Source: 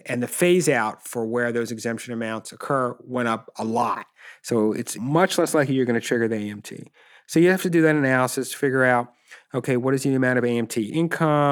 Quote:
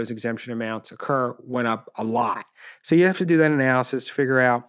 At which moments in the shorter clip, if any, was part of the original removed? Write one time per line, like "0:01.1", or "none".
0:02.8